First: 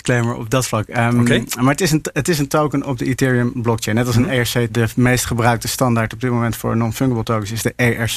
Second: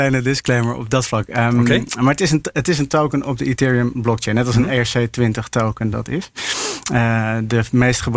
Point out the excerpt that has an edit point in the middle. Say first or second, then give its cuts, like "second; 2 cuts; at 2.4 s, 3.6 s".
first; 1 cut; at 4.7 s